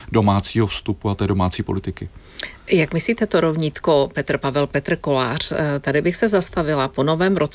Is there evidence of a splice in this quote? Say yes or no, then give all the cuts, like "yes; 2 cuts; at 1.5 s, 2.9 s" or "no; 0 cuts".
no; 0 cuts